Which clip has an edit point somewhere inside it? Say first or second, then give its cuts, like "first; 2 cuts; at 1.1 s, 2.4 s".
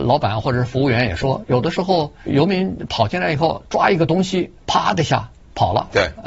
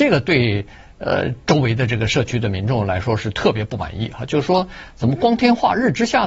first; 2 cuts; at 2.3 s, 4.6 s